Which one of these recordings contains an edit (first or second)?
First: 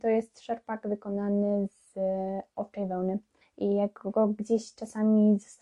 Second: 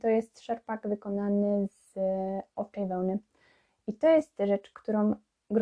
first